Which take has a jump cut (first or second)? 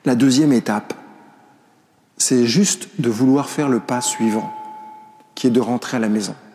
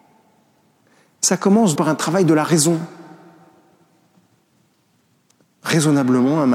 second